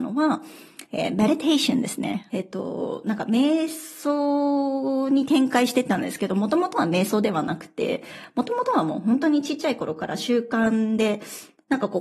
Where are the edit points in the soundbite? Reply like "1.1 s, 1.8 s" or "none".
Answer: 2.3 s